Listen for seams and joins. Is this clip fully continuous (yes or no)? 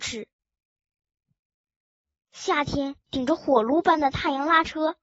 yes